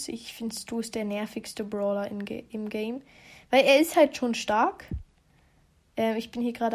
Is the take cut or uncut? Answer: uncut